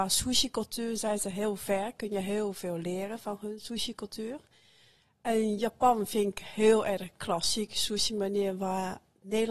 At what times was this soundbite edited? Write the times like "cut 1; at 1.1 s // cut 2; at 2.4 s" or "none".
none